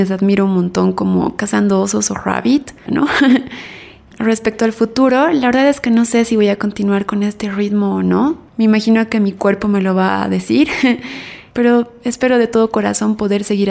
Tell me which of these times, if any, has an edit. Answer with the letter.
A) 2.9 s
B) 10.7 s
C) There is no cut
A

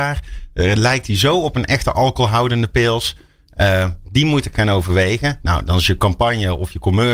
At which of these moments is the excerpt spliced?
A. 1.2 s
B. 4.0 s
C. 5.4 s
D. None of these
B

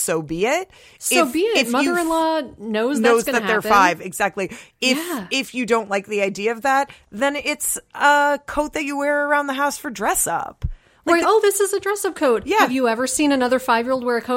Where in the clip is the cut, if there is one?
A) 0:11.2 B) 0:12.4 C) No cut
A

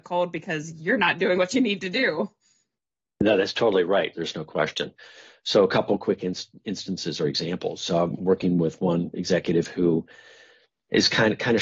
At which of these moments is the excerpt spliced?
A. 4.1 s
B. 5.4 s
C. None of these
A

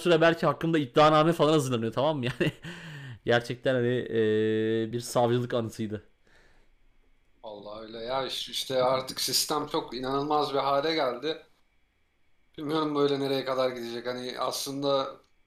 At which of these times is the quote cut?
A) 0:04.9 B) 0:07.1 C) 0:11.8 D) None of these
A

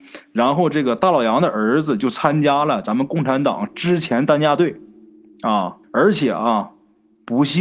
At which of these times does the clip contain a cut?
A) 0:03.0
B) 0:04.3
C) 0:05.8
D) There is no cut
C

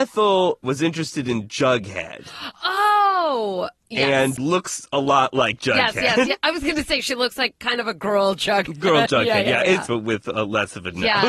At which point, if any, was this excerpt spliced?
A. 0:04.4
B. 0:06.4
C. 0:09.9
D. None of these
C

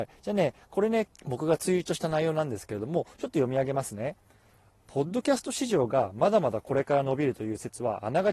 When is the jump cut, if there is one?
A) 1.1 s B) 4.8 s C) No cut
A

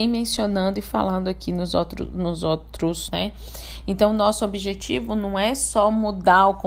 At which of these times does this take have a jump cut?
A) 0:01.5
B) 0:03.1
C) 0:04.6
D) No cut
B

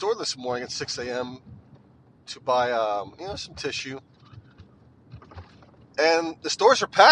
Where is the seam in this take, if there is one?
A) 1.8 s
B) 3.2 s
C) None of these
C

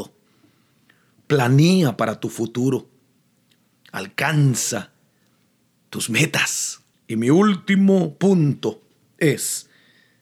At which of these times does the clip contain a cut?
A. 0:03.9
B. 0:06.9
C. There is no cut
B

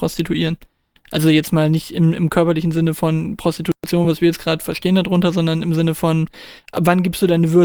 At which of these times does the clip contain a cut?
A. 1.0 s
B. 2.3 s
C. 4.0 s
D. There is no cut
D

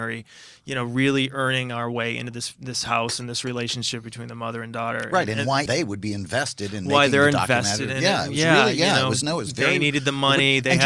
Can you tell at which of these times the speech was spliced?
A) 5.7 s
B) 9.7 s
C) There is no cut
A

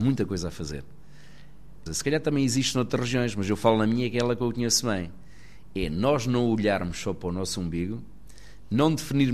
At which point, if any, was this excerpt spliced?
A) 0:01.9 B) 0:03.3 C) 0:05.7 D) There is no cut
A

